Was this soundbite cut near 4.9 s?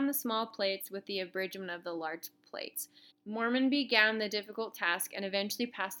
no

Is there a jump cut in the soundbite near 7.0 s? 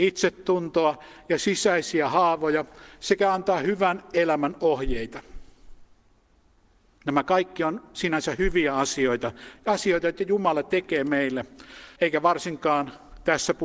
no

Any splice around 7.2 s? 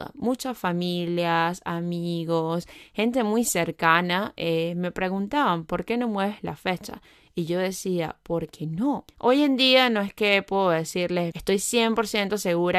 no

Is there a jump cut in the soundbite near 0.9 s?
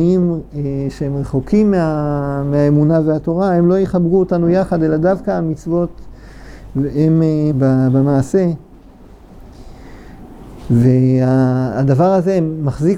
no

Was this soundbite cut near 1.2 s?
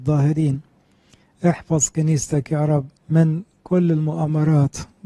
no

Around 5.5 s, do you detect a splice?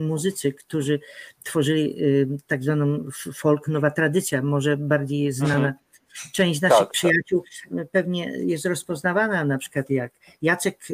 no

